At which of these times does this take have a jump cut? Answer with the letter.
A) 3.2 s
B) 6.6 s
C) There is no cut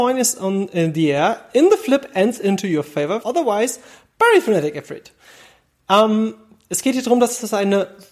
A